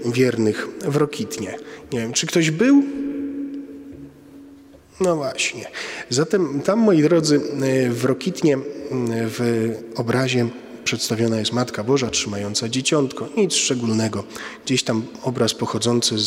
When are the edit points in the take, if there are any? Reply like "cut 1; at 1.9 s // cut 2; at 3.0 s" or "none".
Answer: none